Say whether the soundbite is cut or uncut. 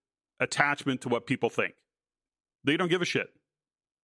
uncut